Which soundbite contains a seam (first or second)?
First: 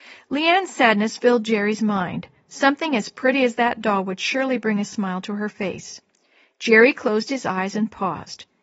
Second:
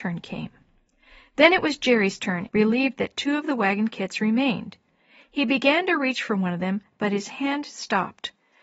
second